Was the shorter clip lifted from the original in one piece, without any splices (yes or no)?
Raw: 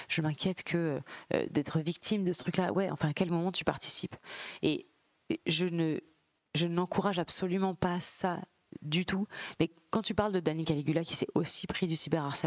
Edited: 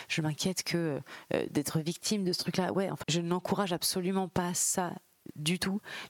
no